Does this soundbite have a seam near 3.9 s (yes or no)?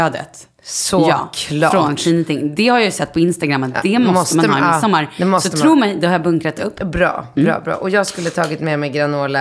no